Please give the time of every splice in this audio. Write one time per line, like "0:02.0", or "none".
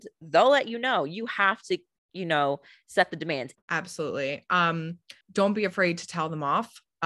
0:03.6
0:05.2